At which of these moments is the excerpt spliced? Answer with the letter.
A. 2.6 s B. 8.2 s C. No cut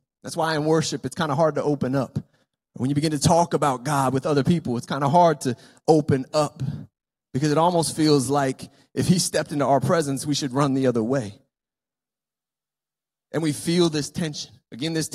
C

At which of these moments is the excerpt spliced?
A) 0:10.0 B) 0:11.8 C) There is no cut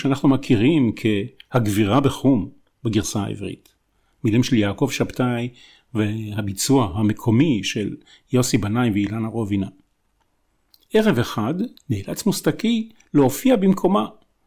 B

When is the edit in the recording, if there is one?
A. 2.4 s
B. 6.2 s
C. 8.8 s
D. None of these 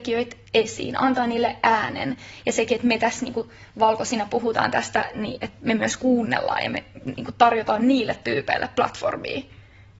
D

